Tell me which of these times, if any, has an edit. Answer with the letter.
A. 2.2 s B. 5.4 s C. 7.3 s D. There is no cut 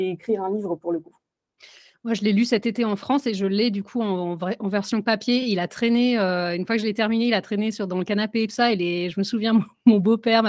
D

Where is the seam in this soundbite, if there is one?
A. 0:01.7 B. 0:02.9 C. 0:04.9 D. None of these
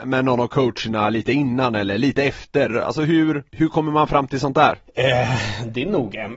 D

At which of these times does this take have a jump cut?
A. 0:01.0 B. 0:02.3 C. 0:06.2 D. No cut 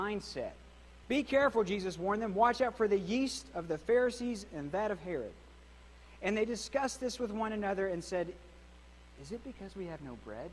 A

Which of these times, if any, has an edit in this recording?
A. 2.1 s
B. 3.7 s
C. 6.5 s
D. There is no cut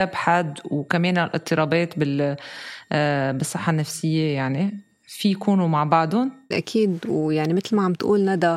C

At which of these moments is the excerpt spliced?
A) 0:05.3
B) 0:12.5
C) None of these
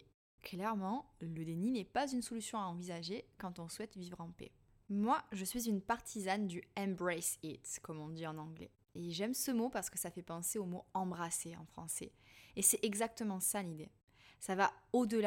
C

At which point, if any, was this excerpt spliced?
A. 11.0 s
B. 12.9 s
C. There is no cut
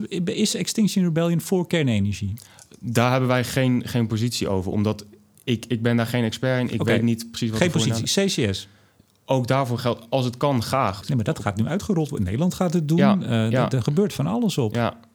A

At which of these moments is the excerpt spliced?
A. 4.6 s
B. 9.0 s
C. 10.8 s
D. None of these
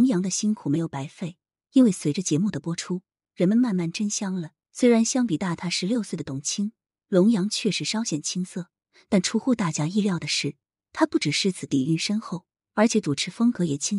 A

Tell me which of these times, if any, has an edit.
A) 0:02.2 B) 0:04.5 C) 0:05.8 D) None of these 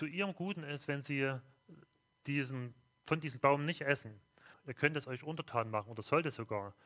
B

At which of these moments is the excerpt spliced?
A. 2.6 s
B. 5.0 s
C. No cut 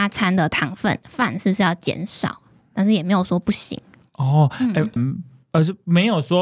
B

